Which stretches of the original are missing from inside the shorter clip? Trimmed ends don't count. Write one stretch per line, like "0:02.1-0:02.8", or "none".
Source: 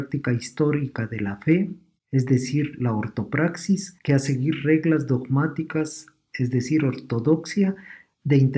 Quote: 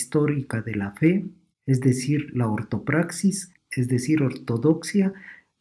0:04.0-0:06.2